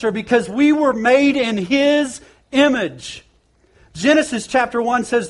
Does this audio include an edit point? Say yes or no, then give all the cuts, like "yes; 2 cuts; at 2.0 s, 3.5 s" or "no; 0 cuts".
no; 0 cuts